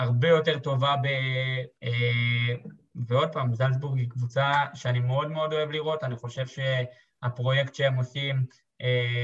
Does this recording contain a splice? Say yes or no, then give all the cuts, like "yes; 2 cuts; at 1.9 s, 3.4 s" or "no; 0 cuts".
yes; 1 cut; at 1.8 s